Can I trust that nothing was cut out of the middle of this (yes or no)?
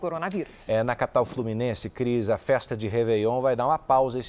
yes